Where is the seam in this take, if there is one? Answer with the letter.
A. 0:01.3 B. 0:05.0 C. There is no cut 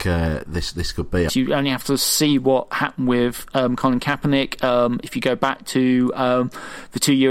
A